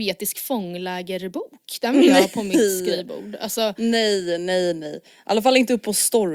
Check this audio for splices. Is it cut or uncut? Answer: uncut